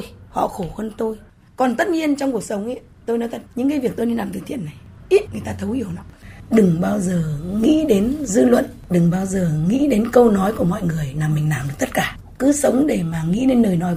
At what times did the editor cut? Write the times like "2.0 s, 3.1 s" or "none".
5.3 s

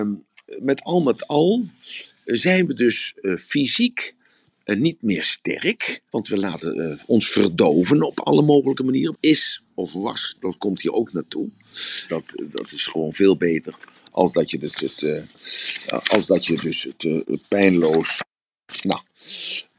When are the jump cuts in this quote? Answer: 6.1 s, 9.1 s, 12.1 s

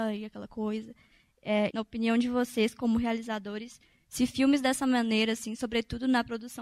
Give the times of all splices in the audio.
1.7 s

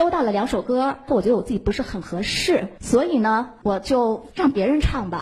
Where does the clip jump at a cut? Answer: 1.1 s

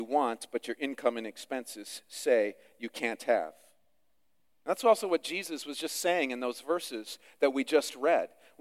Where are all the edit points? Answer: none

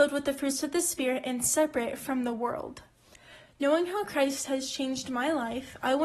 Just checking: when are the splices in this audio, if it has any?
none

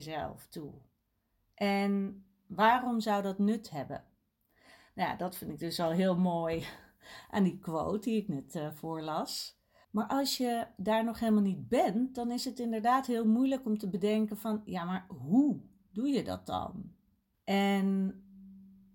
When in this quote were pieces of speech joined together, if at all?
9.8 s, 17.3 s

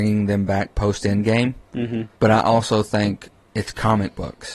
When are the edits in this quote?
2.1 s

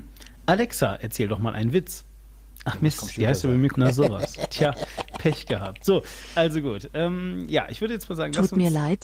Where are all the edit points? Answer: 3.7 s

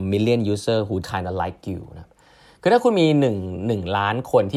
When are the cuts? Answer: 1.0 s

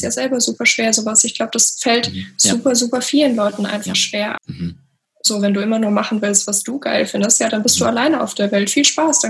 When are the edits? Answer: 4.4 s, 6.5 s

